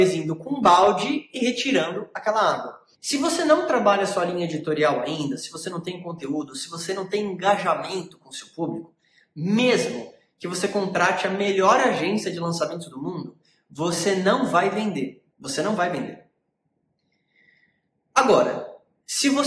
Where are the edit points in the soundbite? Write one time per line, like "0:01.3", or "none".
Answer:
0:02.9
0:15.3